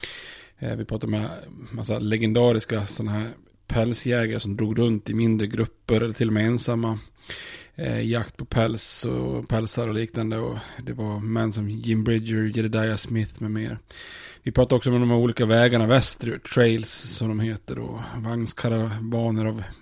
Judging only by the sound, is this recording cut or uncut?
uncut